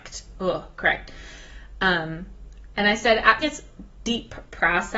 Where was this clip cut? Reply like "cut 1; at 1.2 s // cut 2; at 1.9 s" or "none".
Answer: cut 1; at 3.4 s